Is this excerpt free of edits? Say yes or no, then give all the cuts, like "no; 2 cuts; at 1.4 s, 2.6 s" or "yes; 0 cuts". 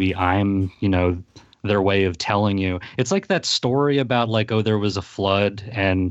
yes; 0 cuts